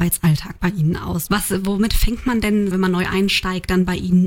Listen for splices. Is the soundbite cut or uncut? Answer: cut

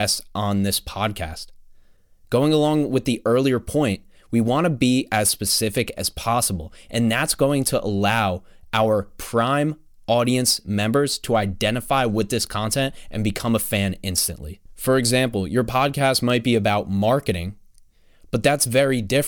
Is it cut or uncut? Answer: uncut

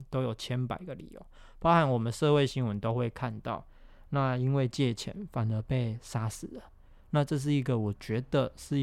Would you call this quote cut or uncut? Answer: uncut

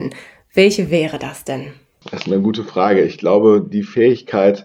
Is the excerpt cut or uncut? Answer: uncut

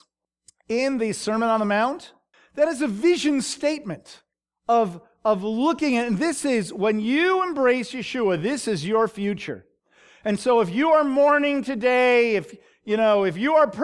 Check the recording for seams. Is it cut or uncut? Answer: uncut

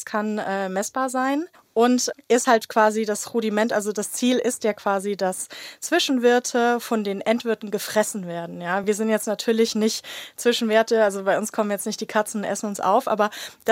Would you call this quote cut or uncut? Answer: uncut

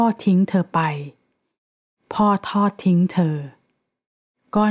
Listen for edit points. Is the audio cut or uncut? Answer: uncut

